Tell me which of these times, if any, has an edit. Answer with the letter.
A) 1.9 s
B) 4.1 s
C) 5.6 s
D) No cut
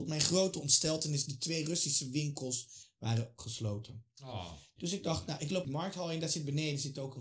C